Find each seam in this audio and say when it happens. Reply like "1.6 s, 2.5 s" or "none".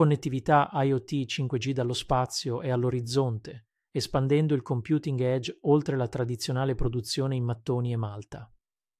none